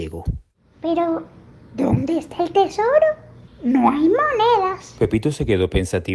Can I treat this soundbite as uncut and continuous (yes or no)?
yes